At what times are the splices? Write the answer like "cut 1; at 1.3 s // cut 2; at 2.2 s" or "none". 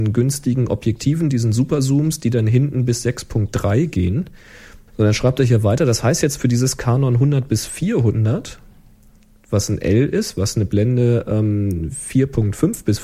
cut 1; at 4.9 s